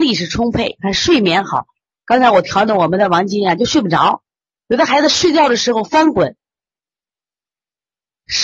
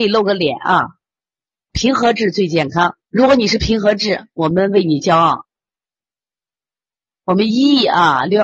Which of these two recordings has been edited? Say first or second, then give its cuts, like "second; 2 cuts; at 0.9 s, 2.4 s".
second; 2 cuts; at 1.7 s, 3.0 s